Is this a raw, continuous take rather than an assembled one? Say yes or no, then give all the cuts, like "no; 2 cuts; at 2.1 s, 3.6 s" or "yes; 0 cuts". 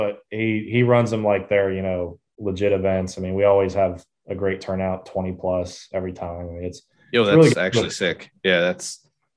yes; 0 cuts